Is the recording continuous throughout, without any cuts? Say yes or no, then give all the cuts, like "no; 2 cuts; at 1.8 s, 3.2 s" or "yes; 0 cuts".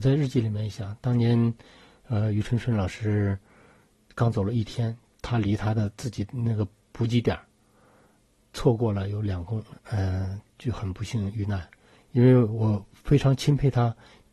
no; 1 cut; at 9.7 s